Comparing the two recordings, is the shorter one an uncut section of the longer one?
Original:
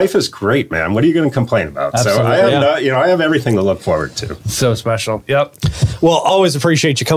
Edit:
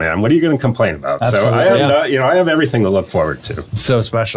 yes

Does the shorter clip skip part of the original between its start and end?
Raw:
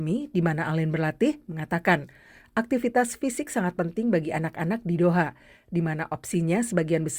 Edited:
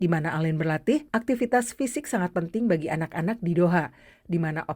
yes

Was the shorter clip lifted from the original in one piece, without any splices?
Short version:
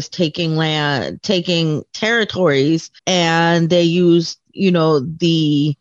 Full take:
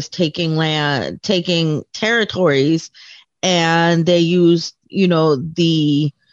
no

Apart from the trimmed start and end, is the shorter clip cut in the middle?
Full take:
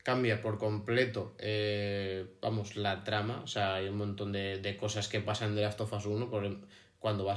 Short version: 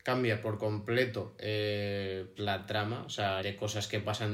yes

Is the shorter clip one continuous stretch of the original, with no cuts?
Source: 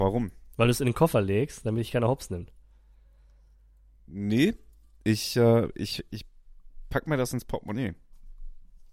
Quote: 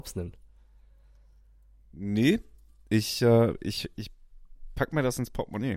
yes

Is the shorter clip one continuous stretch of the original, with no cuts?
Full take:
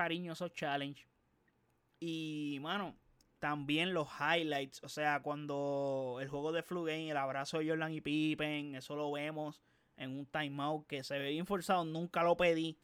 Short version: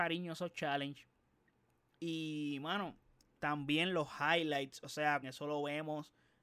no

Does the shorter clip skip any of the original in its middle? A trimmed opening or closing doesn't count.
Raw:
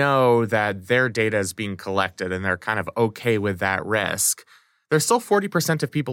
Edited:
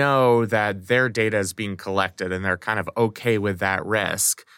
no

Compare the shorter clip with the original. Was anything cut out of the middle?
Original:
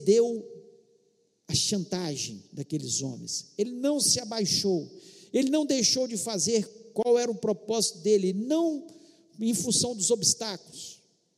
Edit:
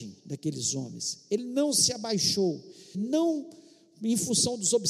yes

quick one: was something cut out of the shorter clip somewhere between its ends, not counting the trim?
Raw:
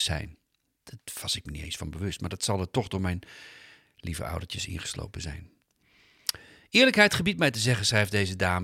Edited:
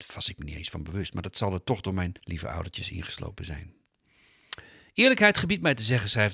yes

